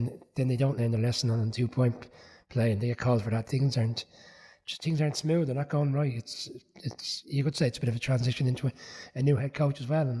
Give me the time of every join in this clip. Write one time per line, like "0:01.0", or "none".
0:03.5